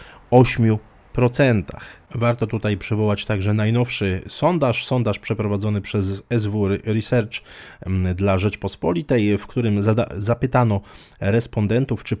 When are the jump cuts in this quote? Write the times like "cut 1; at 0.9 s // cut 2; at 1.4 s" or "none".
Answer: none